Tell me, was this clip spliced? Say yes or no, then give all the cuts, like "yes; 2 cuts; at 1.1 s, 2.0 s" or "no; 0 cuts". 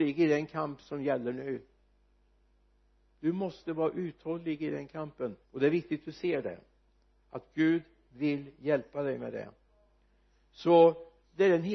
yes; 1 cut; at 5.4 s